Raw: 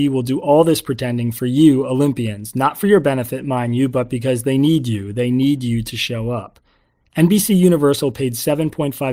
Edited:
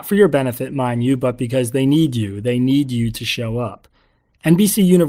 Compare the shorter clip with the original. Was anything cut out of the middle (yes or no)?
no